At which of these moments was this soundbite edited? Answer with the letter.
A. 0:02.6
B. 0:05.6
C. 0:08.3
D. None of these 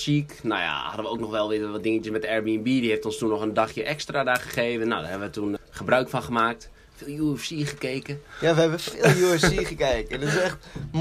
B